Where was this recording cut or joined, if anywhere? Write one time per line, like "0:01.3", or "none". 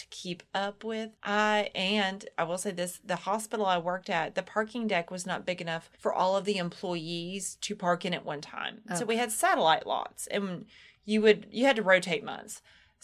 0:01.1
0:05.9